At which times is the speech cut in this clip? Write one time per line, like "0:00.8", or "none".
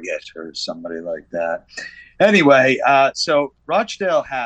none

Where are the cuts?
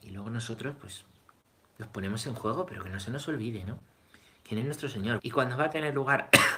0:05.2

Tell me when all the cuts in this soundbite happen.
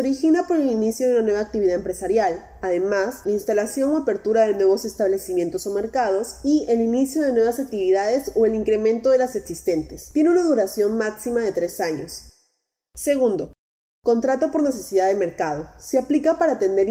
0:03.2

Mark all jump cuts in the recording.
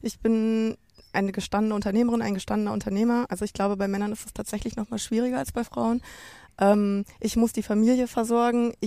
none

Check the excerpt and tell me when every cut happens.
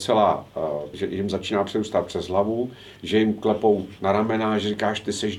0:00.9
0:03.0

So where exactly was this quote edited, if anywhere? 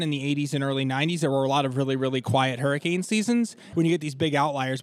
0:03.7

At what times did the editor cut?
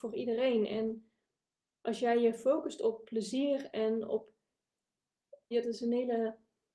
0:05.5

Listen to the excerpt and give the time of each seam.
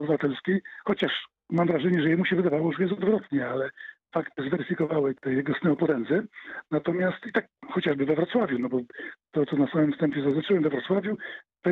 0:05.2

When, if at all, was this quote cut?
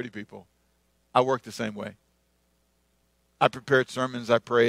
none

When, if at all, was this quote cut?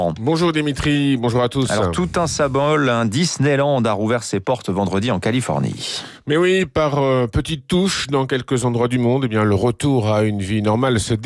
none

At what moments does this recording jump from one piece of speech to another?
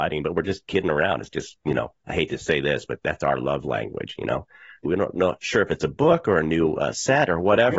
0:04.8

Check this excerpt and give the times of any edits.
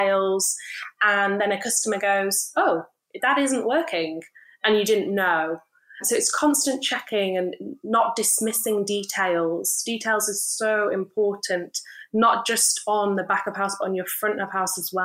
none

